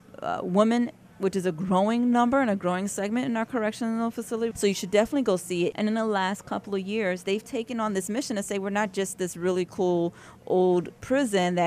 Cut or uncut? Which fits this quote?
cut